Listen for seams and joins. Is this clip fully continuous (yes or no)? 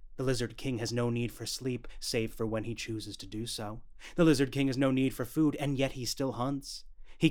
yes